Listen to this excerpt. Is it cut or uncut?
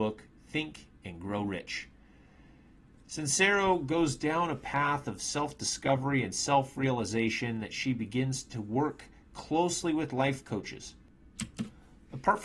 uncut